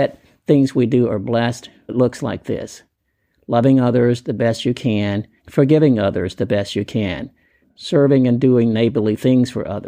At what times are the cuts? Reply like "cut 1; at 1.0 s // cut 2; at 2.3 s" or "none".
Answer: cut 1; at 1.9 s // cut 2; at 5.4 s // cut 3; at 7.6 s